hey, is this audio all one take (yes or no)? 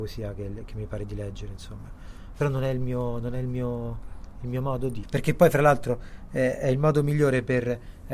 yes